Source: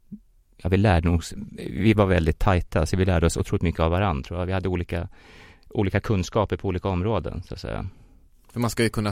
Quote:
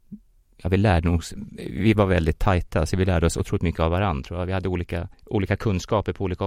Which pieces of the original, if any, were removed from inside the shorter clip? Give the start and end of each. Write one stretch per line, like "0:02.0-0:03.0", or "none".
0:05.1-0:05.6